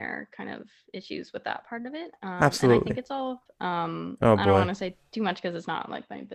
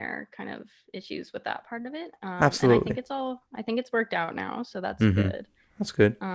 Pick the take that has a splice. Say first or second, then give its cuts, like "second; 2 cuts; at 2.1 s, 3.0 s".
first; 1 cut; at 3.5 s